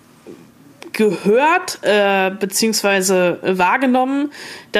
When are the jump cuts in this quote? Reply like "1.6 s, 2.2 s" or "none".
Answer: 0.9 s